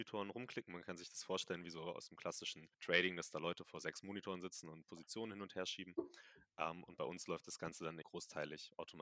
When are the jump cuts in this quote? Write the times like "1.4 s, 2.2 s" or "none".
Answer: 2.7 s, 8.0 s